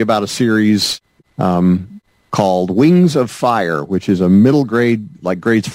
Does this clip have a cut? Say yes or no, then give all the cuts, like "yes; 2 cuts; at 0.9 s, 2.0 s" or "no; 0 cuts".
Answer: no; 0 cuts